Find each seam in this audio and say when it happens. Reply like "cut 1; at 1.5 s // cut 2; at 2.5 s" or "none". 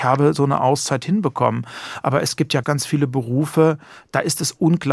cut 1; at 2.6 s